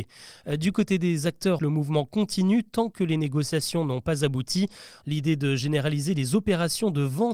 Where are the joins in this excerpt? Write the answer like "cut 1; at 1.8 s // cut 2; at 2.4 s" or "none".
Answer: cut 1; at 1.6 s // cut 2; at 5.0 s